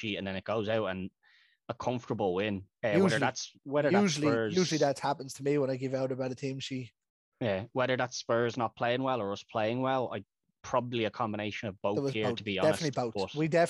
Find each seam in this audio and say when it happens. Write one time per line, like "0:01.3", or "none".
none